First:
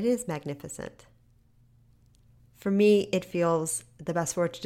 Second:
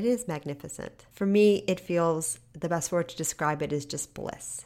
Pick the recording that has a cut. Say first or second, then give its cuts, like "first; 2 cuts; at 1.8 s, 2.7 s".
second; 1 cut; at 1.1 s